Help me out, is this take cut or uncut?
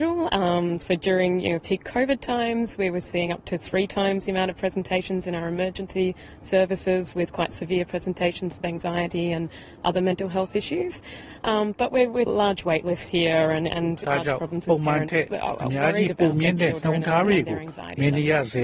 cut